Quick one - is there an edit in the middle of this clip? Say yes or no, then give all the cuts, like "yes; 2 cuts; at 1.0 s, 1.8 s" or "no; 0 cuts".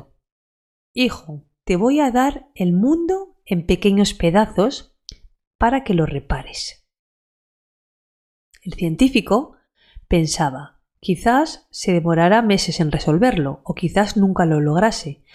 yes; 1 cut; at 1.6 s